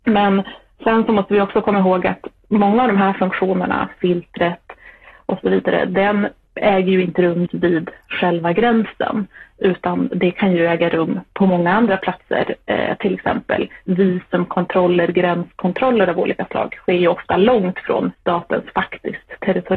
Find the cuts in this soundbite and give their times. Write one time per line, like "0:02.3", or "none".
0:04.0
0:07.5
0:18.1